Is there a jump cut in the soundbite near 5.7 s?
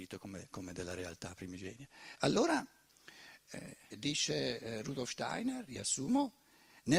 no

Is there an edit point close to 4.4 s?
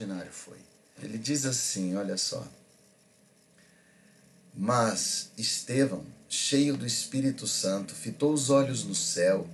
no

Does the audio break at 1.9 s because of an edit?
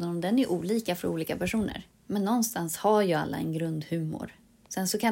yes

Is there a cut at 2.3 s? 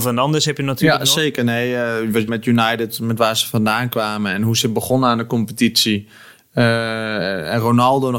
yes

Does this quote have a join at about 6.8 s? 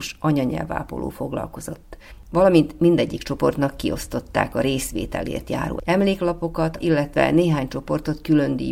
yes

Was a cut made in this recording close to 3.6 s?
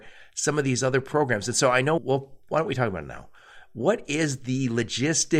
no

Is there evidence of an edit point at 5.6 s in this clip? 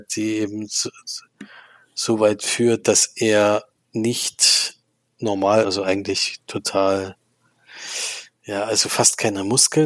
yes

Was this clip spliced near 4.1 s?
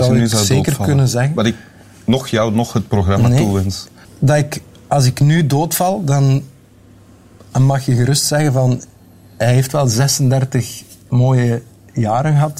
yes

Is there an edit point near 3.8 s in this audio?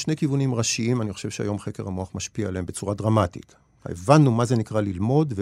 yes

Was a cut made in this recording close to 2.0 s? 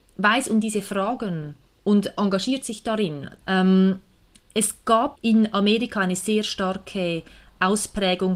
no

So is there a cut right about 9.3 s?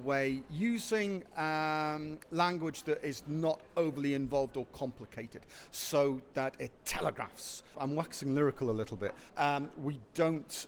yes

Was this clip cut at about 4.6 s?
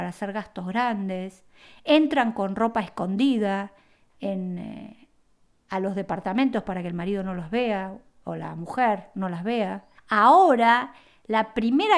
no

